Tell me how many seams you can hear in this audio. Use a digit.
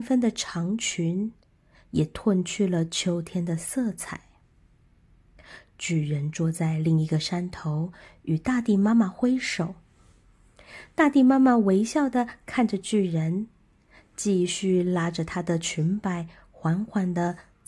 1